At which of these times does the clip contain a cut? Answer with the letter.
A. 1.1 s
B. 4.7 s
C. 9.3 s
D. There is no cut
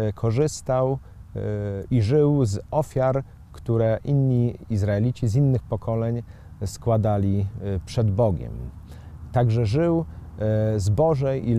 D